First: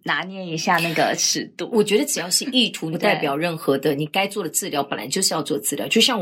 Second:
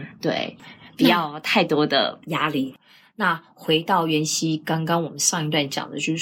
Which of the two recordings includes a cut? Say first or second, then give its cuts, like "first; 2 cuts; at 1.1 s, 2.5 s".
first; 1 cut; at 2.9 s